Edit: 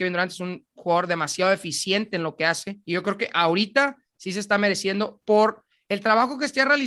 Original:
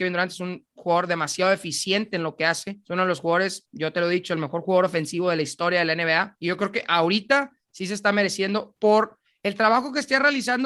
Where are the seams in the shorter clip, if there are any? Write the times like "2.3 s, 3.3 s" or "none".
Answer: 2.8 s